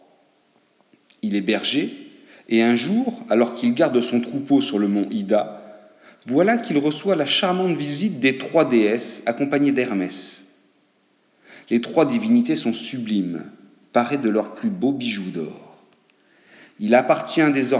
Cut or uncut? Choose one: uncut